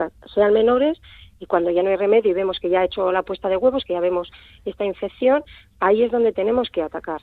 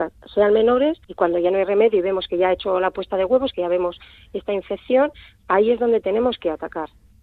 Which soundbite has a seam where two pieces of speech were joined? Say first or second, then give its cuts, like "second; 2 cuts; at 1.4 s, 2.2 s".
second; 1 cut; at 1.0 s